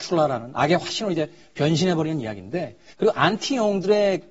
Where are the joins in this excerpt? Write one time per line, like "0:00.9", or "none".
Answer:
0:02.9